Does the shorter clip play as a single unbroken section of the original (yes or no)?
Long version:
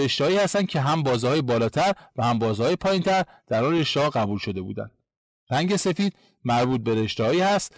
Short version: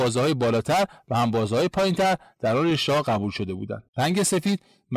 no